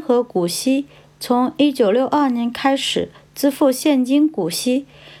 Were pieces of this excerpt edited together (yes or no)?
no